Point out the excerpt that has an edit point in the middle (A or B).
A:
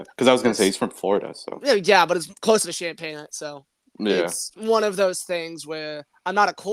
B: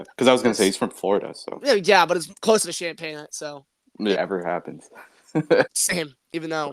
B